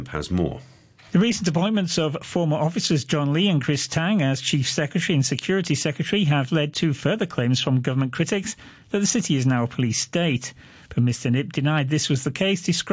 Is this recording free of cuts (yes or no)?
yes